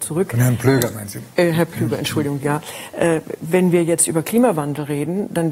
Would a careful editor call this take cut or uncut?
uncut